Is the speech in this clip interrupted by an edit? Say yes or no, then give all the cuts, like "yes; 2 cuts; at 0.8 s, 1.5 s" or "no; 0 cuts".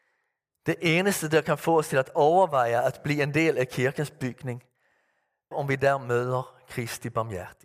yes; 1 cut; at 5.5 s